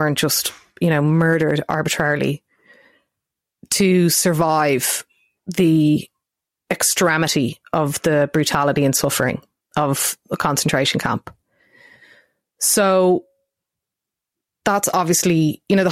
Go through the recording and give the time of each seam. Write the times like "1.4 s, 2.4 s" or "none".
none